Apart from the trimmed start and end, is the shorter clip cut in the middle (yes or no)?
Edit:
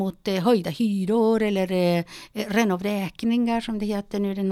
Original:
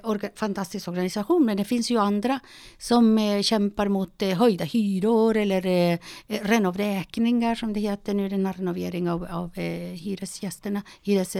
no